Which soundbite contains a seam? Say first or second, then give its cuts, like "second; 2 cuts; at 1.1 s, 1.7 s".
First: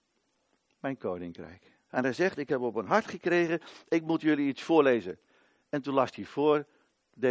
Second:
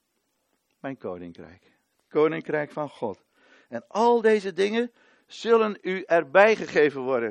first; 1 cut; at 1.9 s